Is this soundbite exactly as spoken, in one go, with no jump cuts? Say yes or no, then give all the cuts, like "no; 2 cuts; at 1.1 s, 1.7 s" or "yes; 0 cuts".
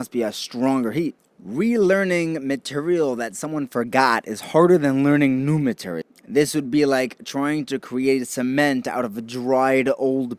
yes; 0 cuts